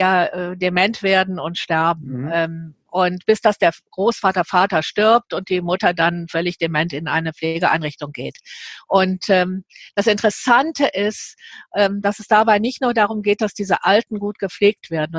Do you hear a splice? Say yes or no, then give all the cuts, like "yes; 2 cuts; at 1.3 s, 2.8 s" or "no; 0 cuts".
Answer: no; 0 cuts